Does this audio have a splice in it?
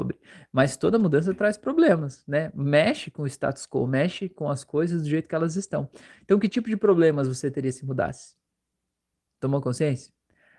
no; 0 cuts

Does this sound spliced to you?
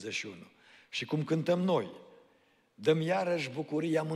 no; 0 cuts

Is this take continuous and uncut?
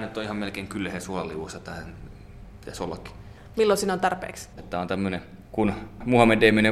no; 2 cuts; at 3.5 s, 4.6 s

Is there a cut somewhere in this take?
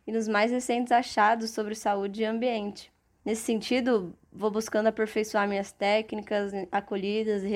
yes; 1 cut; at 3.2 s

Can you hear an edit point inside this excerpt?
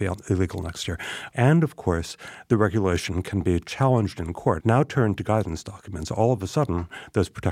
yes; 2 cuts; at 1.3 s, 4.6 s

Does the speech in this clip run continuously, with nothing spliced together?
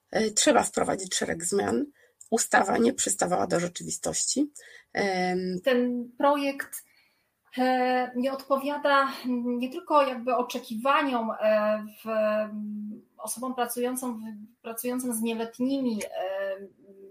no; 1 cut; at 5.6 s

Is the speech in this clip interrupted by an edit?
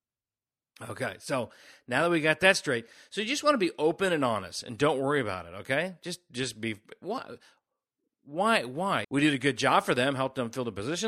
yes; 1 cut; at 9.0 s

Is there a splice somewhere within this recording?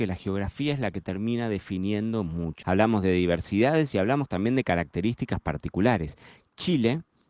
yes; 1 cut; at 2.6 s

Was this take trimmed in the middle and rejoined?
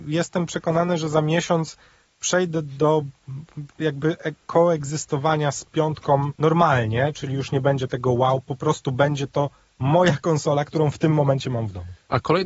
yes; 1 cut; at 6.4 s

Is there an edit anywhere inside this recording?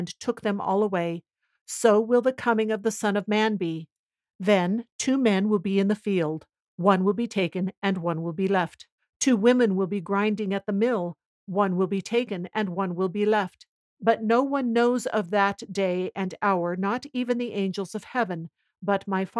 yes; 1 cut; at 13.9 s

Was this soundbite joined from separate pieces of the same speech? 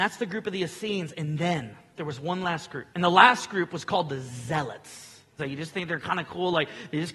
yes; 2 cuts; at 2.9 s, 5.4 s

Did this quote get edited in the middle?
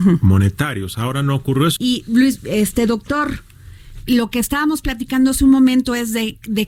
yes; 2 cuts; at 1.8 s, 4.0 s

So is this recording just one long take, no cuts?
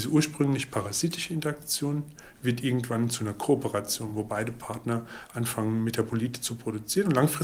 yes; 0 cuts

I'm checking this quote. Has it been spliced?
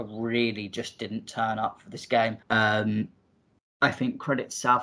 yes; 1 cut; at 2.4 s

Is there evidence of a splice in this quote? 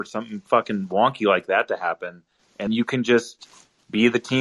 yes; 1 cut; at 2.7 s

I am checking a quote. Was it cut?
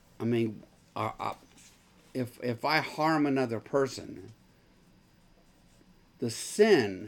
no; 0 cuts

